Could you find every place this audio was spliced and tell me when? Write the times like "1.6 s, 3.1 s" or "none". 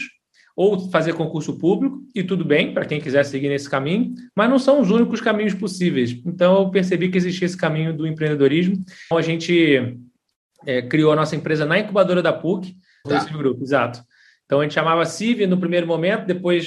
9.1 s, 13.0 s